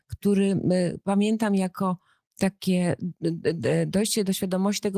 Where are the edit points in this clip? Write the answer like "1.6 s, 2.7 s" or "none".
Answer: none